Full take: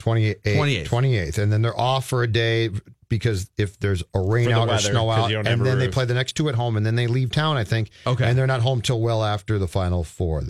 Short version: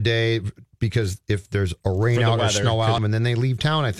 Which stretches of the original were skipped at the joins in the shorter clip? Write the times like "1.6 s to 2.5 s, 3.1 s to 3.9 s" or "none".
5.3 s to 6.7 s